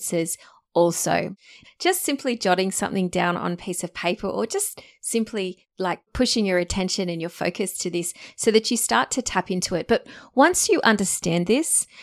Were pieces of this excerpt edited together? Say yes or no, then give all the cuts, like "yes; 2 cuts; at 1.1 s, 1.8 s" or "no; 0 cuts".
yes; 1 cut; at 1.6 s